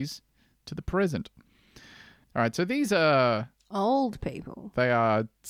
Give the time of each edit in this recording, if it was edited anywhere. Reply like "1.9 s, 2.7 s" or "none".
2.2 s

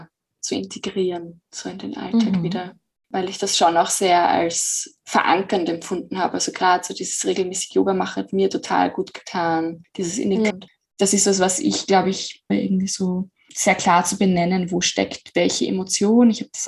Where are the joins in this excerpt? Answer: 10.5 s, 12.5 s

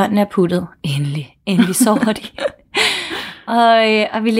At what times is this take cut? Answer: none

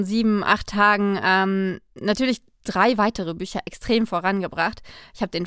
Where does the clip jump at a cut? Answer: none

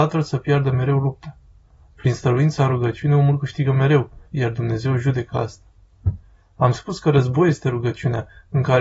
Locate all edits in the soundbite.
4.3 s

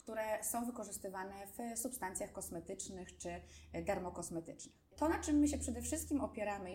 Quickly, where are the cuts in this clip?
5.0 s

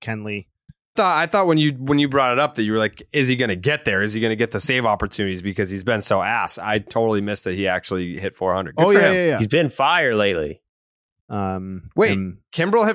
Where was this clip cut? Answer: 1.0 s, 11.2 s

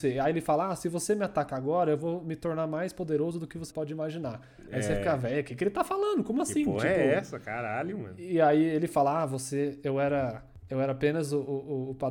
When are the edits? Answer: 3.7 s

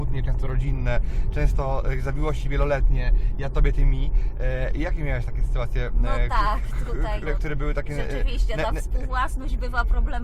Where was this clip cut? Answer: 7.3 s

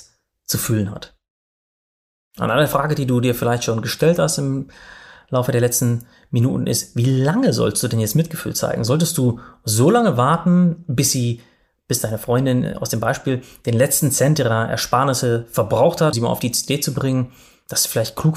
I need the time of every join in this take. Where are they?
16.1 s

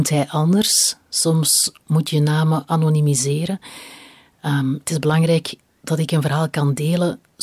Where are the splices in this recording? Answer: none

